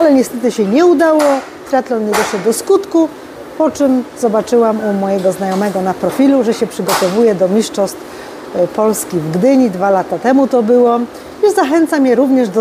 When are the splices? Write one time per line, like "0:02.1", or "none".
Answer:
none

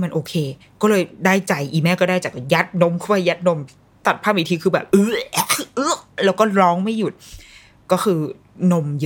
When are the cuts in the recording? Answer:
none

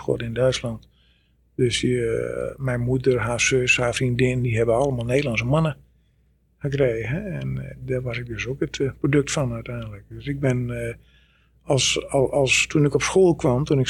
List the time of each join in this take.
none

